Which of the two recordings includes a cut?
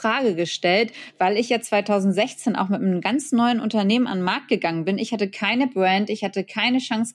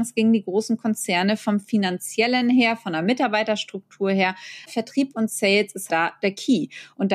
second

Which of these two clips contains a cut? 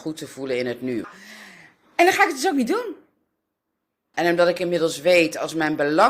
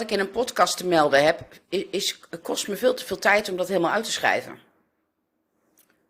first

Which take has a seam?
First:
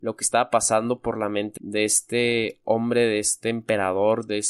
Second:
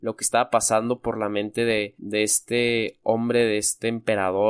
first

